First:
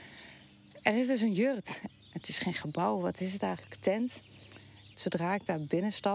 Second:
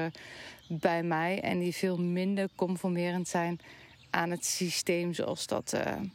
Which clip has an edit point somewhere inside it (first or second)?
first